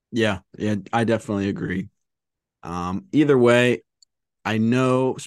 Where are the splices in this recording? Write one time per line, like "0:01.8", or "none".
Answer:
none